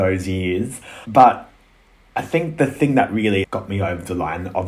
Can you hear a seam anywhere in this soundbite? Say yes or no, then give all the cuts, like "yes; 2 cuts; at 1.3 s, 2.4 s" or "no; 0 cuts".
yes; 1 cut; at 1.0 s